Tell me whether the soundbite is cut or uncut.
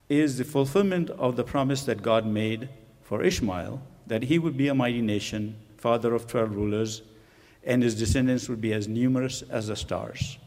uncut